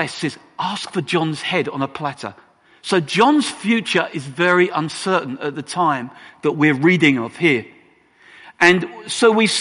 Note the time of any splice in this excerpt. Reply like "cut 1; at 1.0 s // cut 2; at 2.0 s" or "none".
none